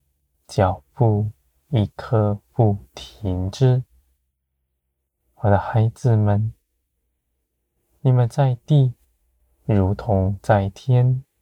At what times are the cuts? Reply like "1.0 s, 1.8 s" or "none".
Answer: none